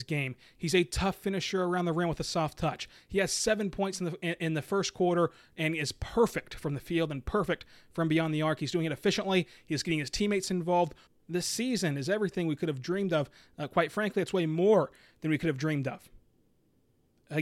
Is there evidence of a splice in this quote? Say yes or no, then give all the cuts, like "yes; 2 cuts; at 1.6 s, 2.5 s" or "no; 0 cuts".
yes; 1 cut; at 11.1 s